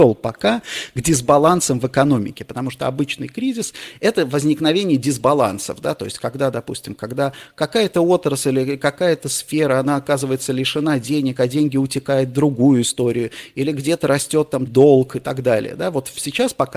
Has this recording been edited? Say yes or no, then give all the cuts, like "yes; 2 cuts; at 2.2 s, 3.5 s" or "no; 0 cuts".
yes; 1 cut; at 14.7 s